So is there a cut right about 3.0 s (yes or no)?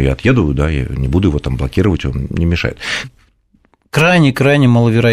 yes